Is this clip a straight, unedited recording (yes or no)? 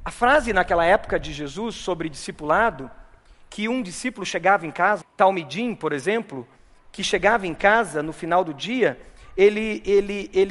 no